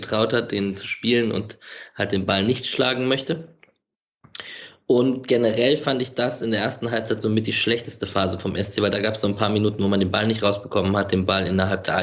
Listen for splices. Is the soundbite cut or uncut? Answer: uncut